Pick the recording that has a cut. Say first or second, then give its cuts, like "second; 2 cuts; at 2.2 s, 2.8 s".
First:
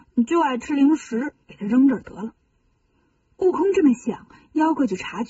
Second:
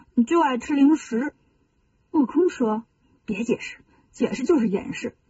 first; 1 cut; at 1.4 s